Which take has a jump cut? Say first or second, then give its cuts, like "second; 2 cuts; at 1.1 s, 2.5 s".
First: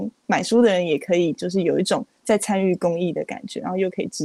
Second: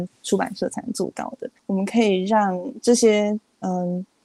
second; 1 cut; at 1.6 s